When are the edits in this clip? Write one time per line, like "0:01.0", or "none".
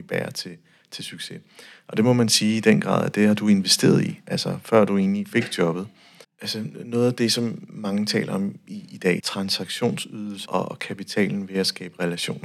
0:06.2
0:09.2
0:10.5